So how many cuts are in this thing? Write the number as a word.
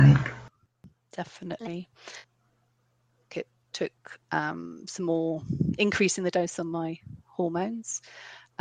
one